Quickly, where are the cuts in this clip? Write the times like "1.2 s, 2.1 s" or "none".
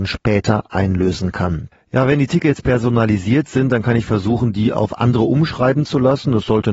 1.7 s